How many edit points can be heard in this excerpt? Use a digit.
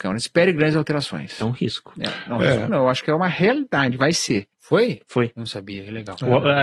1